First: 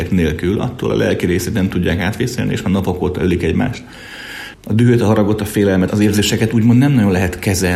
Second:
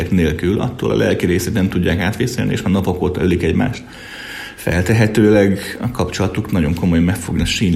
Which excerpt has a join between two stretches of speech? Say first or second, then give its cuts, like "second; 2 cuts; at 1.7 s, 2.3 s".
first; 2 cuts; at 4.5 s, 5.9 s